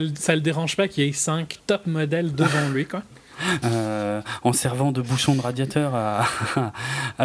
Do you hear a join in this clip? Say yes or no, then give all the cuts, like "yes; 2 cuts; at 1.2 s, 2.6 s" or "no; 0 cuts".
yes; 1 cut; at 3.6 s